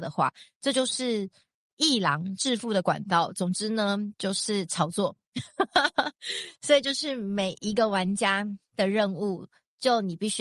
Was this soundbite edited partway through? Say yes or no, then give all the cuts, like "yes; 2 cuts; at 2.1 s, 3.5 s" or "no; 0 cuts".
no; 0 cuts